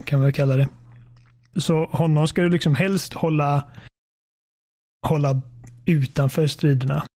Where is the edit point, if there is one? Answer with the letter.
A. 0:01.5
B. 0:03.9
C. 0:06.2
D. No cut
A